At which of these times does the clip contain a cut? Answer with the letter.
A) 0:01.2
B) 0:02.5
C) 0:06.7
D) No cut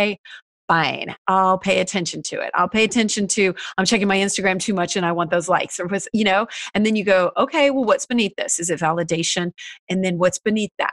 D